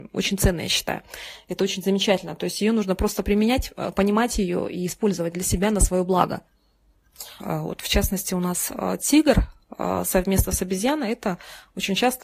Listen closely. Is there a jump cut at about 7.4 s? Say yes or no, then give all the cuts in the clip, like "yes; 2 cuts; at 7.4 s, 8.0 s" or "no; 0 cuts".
yes; 1 cut; at 7.4 s